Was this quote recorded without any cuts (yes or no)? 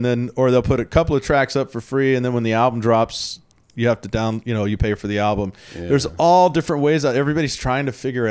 yes